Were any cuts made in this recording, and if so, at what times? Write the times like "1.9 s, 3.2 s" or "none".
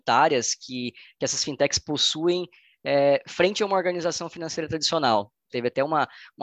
5.5 s